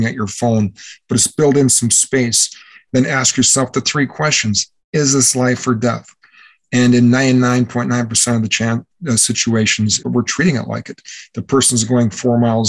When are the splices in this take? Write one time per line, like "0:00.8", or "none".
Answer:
0:10.0